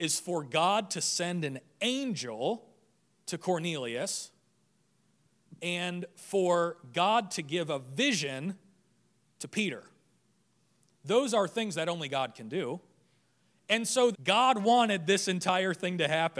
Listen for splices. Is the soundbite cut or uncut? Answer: cut